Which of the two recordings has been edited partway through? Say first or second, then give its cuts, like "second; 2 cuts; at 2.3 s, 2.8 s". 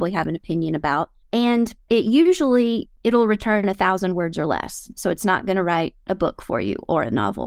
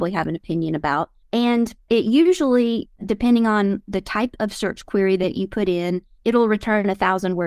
first; 1 cut; at 3.0 s